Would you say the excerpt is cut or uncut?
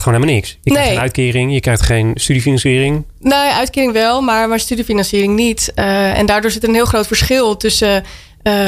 uncut